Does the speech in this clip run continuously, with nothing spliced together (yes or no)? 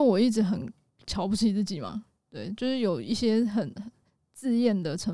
yes